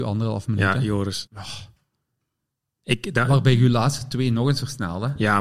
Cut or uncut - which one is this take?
cut